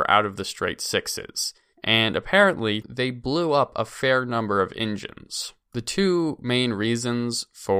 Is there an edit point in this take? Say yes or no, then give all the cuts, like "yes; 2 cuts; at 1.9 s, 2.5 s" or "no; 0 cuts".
yes; 2 cuts; at 1.7 s, 2.8 s